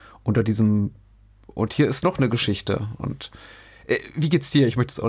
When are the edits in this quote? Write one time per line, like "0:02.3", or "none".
none